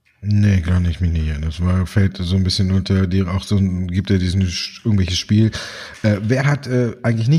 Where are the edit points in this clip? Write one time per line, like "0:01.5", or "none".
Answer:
none

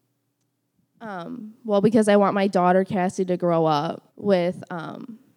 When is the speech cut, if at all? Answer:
0:04.1

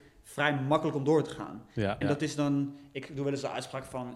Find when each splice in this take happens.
0:02.0

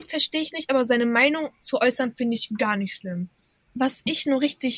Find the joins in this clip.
0:03.6

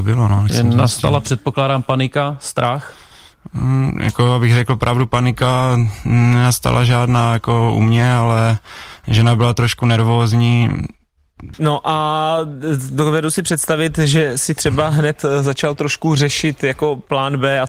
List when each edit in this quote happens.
0:11.5

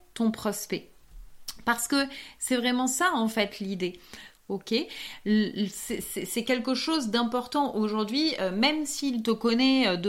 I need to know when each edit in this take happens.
0:04.4

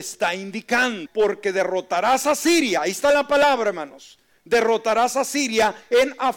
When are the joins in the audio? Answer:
0:01.1

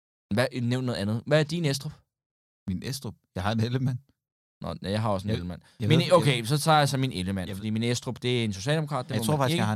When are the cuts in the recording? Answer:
none

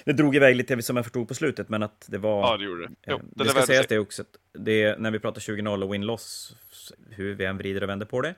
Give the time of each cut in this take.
0:02.9
0:06.9

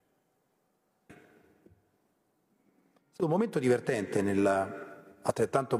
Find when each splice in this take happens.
0:01.1

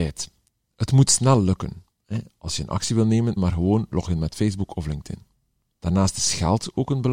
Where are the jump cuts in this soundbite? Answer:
0:03.4

